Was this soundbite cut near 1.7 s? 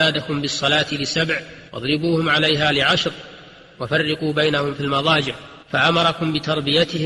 yes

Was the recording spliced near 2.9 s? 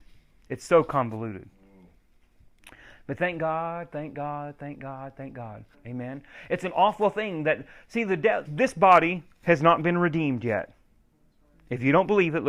no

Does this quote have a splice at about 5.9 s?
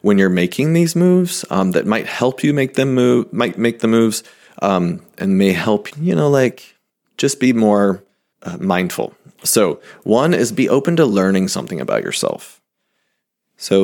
yes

